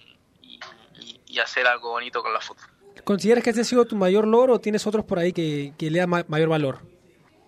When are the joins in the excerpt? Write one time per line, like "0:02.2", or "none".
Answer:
0:05.3

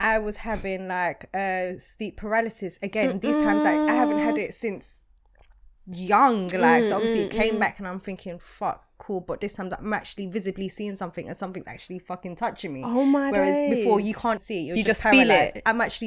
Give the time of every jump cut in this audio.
0:14.4

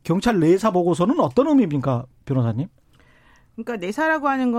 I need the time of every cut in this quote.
none

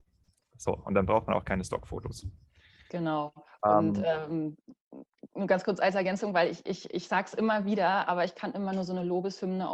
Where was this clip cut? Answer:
none

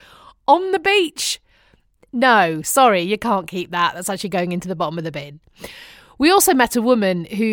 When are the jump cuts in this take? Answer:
none

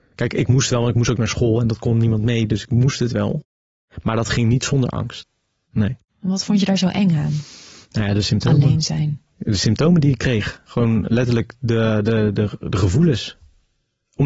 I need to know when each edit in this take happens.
none

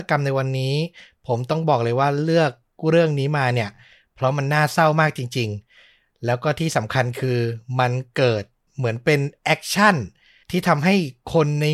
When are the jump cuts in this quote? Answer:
none

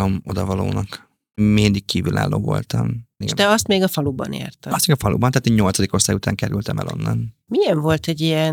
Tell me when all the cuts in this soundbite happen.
0:03.2

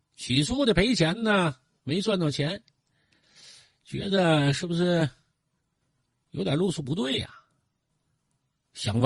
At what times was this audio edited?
none

